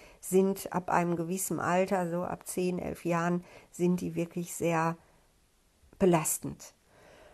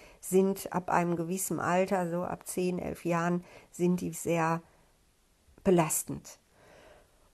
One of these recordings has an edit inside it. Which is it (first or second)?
second